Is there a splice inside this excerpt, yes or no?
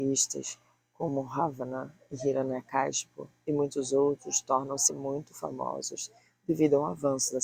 no